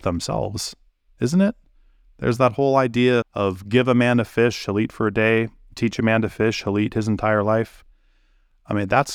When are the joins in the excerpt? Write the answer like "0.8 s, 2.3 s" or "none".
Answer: 3.2 s

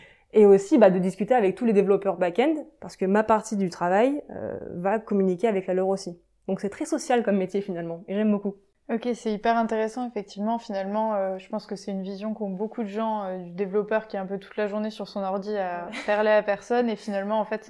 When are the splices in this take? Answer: none

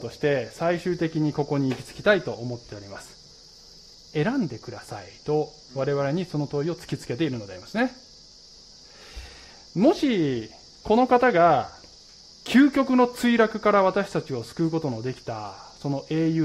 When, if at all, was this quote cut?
3.9 s

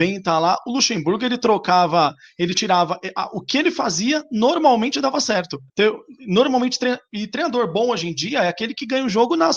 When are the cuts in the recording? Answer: none

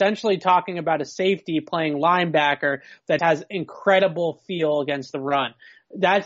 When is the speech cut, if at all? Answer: 3.2 s

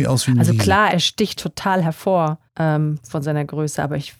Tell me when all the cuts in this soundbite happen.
0.9 s, 2.5 s

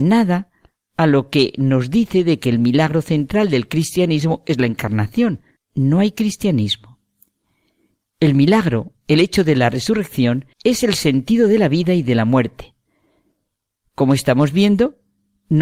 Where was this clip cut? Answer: 5.6 s, 10.5 s

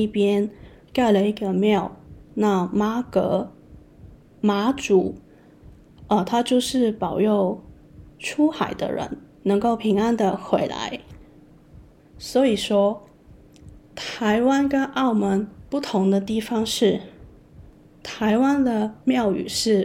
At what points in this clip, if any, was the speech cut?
12.0 s

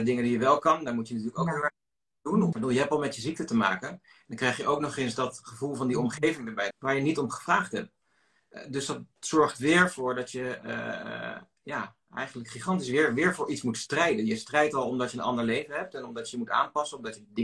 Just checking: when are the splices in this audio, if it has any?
2.5 s, 6.7 s

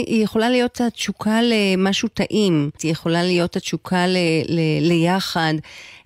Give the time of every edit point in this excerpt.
2.8 s

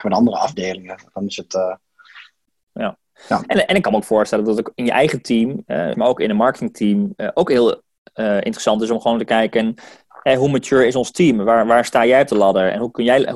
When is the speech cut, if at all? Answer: 5.9 s

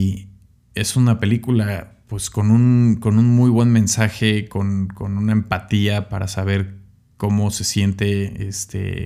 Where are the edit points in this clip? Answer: none

